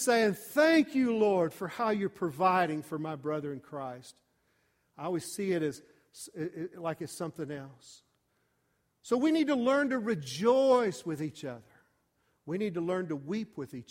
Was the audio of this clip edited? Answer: no; 0 cuts

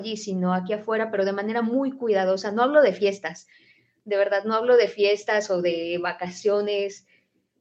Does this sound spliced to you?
no; 0 cuts

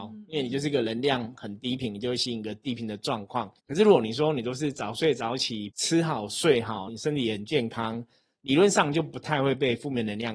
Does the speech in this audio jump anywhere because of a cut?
yes; 3 cuts; at 3.6 s, 5.7 s, 6.9 s

